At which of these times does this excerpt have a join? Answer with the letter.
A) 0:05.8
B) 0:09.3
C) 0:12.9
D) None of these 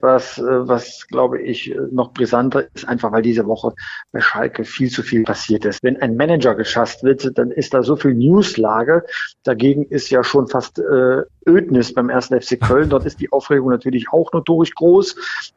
A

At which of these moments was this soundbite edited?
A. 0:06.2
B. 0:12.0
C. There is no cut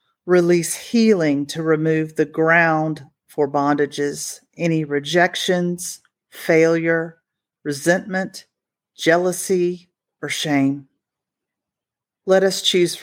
C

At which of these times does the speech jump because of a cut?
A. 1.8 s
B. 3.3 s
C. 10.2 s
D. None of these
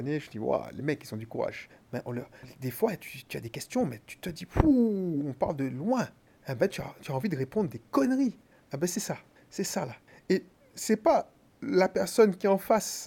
D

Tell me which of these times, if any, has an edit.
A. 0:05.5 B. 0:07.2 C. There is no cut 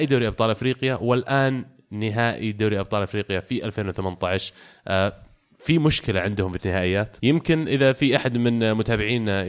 B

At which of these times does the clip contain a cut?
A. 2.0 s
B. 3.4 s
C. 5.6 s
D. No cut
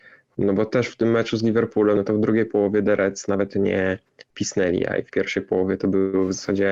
D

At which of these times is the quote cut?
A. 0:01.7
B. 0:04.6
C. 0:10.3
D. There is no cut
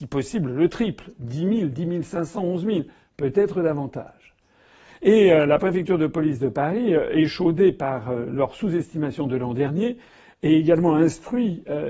D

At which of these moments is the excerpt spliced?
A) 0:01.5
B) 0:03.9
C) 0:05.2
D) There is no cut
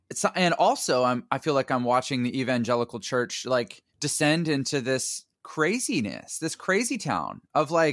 B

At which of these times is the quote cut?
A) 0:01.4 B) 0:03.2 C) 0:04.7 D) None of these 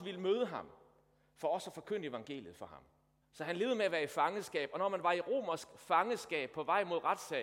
B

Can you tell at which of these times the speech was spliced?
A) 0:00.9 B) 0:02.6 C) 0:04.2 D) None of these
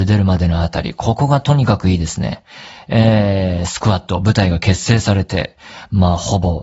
D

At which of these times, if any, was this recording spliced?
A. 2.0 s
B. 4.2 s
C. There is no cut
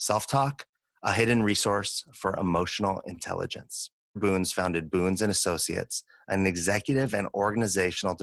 B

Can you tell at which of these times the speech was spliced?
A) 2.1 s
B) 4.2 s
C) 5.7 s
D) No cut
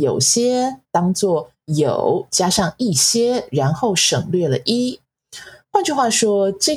D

